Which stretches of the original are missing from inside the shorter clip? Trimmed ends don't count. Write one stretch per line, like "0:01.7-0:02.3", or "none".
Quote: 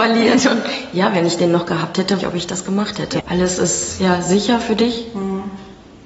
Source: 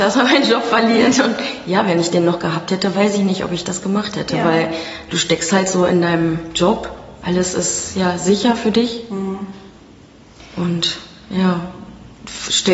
0:02.9-0:03.4
0:04.4-0:07.2